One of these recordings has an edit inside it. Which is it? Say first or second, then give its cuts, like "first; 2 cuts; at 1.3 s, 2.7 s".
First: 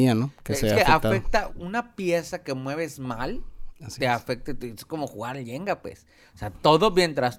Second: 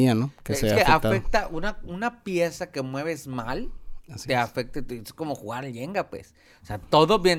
first; 1 cut; at 1.5 s